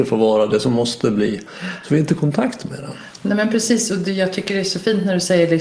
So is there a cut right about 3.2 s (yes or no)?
no